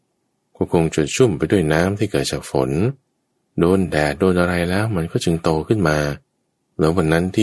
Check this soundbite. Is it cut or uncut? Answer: uncut